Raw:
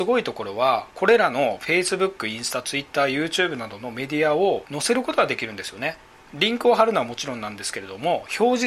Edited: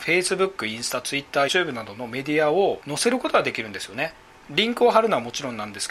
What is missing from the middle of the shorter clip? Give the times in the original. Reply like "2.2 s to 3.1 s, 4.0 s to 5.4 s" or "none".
3.1 s to 3.3 s